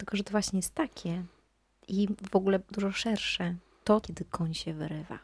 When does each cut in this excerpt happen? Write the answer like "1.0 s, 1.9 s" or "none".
2.7 s, 4.0 s